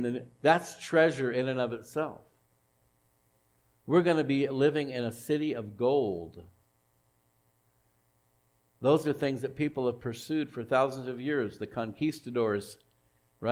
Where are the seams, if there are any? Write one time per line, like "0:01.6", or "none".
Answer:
none